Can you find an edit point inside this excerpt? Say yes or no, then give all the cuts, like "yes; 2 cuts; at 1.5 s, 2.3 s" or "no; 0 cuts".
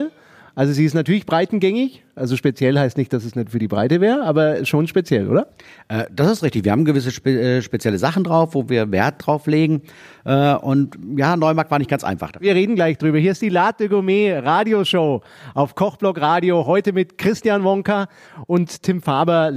no; 0 cuts